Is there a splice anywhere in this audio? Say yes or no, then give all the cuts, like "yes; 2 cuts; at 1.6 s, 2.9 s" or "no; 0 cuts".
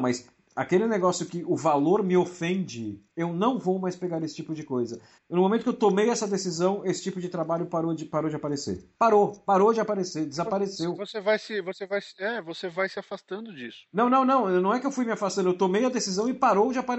yes; 1 cut; at 5.2 s